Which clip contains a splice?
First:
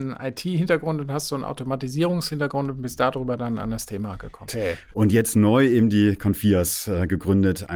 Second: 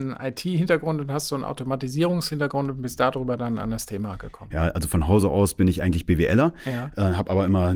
first; 1 cut; at 4.5 s

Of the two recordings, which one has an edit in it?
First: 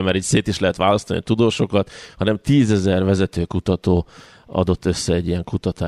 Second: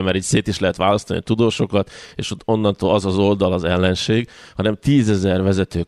first; 1 cut; at 2.1 s

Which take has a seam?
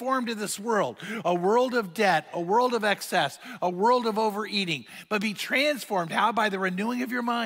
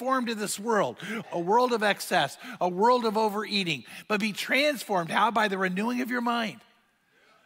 second; 1 cut; at 1.2 s

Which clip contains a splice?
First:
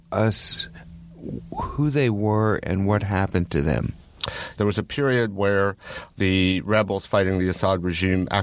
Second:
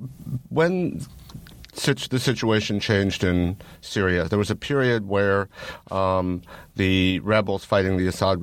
first; 2 cuts; at 4.6 s, 6.1 s

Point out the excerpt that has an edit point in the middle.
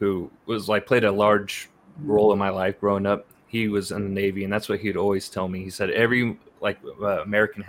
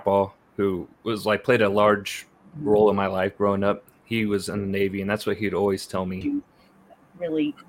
second; 1 cut; at 6.2 s

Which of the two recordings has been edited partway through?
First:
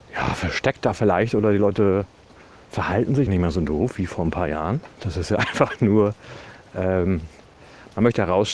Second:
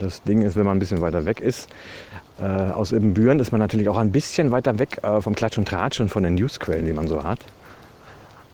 first; 2 cuts; at 3.3 s, 5.0 s

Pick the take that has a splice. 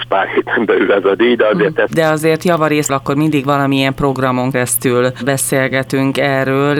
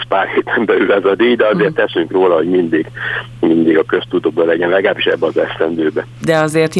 first; 3 cuts; at 1.9 s, 2.9 s, 4.5 s

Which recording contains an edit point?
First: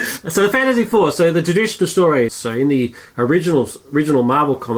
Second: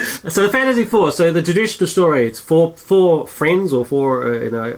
first; 1 cut; at 2.3 s

